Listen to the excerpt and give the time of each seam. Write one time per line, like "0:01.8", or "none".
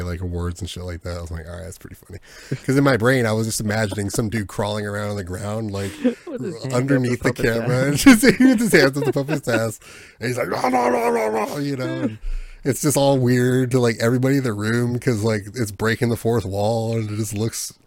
none